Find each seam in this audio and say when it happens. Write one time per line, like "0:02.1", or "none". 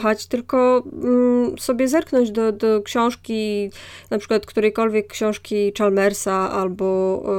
0:02.5